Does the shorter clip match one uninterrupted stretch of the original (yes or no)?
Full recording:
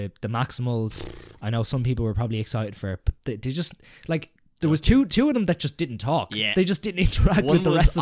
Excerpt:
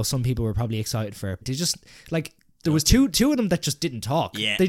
no